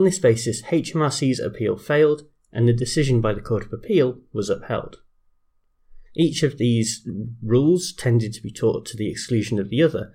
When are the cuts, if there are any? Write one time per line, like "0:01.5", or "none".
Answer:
0:06.1

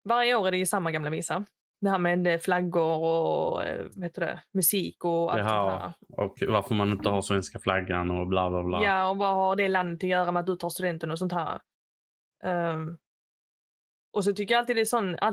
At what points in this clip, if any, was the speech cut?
none

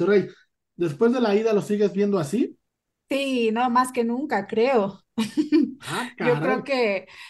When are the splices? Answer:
none

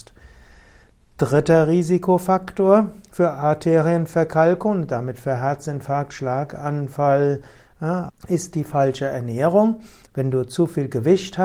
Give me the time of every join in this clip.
0:08.1
0:10.1

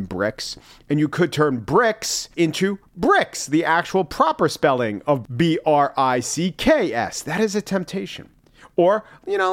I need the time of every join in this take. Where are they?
0:05.2

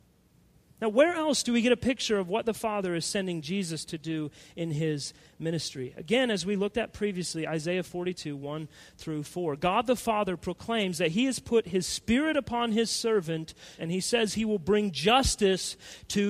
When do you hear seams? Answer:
0:13.8

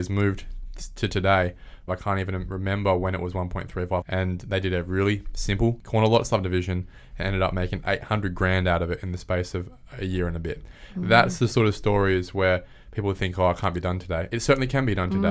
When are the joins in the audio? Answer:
0:01.9
0:04.0

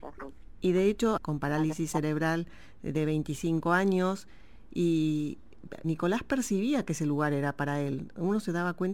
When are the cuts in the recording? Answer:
0:01.2
0:05.8

